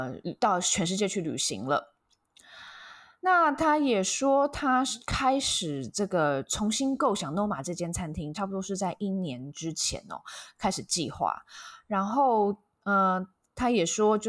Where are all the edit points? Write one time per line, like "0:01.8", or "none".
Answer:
none